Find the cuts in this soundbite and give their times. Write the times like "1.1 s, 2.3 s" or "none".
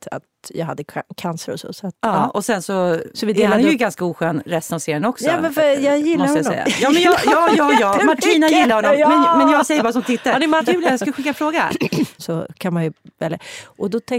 10.6 s, 12.2 s